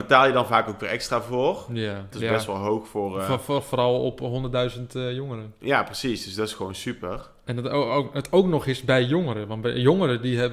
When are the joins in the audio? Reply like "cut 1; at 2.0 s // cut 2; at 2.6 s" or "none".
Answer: cut 1; at 2.1 s